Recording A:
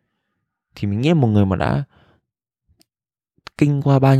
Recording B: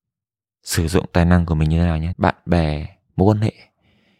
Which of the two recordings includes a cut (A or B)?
B